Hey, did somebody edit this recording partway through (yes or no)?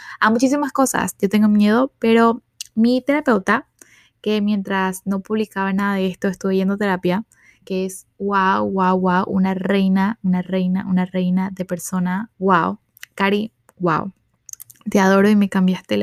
yes